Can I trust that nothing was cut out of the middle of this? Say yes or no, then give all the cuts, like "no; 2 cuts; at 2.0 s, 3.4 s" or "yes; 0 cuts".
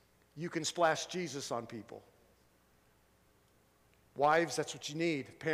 no; 1 cut; at 4.1 s